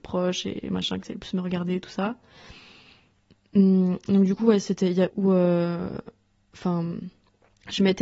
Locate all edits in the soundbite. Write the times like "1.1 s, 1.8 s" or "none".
5.1 s